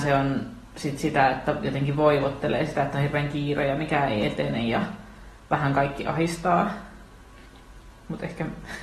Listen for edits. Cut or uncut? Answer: uncut